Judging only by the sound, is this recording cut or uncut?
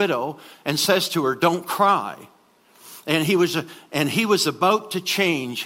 uncut